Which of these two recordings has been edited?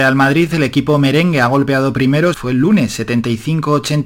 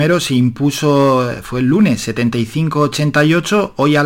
first; 1 cut; at 2.3 s

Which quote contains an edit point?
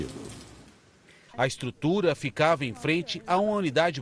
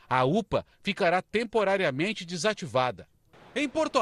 first; 1 cut; at 1.3 s

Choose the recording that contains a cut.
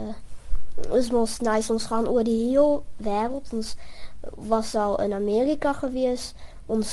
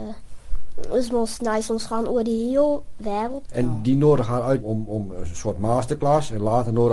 second; 2 cuts; at 3.5 s, 4.6 s

